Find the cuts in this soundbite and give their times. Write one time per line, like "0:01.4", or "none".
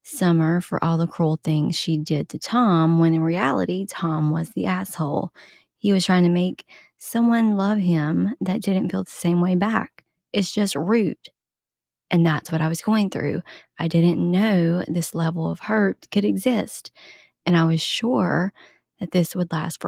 none